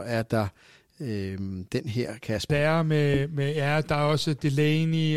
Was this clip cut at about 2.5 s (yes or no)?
yes